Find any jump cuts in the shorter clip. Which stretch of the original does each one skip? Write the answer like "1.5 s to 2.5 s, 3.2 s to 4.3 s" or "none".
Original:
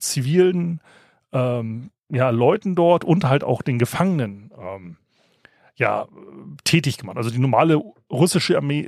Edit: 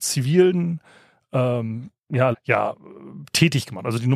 2.3 s to 5.6 s